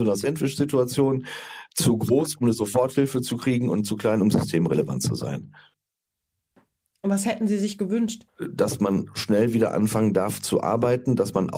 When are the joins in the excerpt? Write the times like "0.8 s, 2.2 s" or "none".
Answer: none